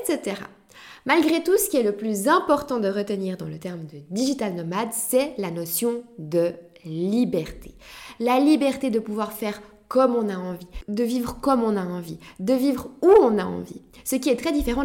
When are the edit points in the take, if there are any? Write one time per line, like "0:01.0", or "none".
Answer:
none